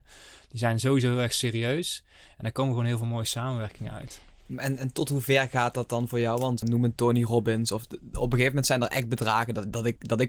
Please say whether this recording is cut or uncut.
cut